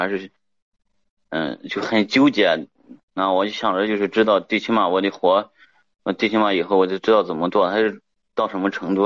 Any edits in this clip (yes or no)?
yes